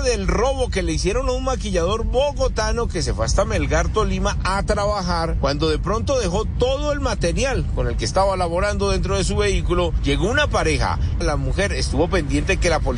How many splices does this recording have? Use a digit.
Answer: 1